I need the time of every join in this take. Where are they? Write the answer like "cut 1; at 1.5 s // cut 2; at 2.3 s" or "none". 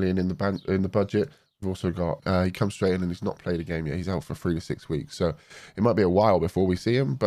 cut 1; at 2.2 s